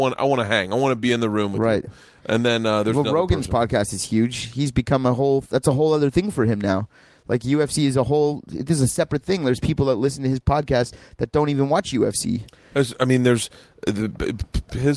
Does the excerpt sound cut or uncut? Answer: uncut